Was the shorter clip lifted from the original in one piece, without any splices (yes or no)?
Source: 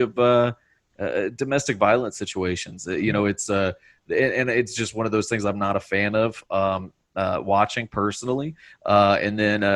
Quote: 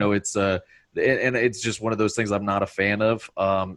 yes